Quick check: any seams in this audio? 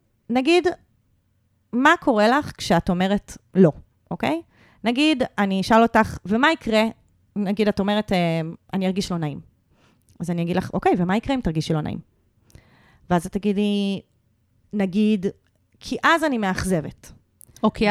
no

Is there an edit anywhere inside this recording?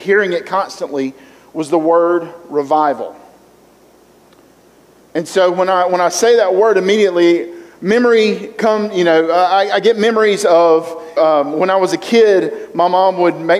yes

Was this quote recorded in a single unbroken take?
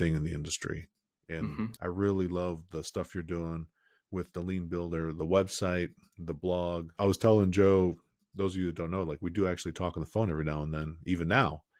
yes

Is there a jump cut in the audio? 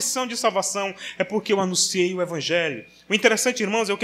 no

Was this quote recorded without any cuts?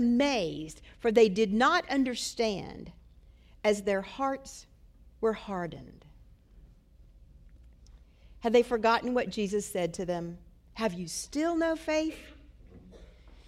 yes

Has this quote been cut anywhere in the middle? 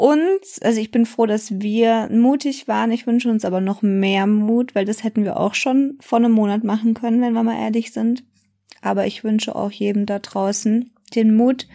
no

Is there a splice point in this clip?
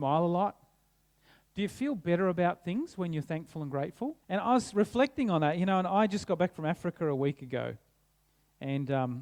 yes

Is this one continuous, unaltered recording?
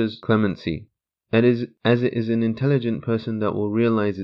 yes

